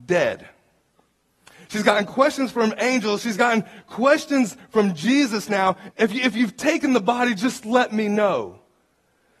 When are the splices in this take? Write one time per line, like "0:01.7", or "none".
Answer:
0:05.9